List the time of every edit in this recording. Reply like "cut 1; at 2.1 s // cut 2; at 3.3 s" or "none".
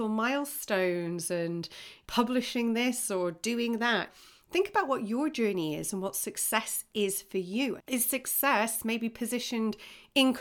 cut 1; at 7.8 s